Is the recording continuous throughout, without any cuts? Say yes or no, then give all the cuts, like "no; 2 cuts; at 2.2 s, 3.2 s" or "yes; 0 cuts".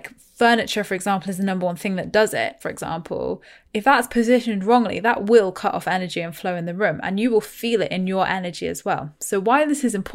no; 1 cut; at 2.6 s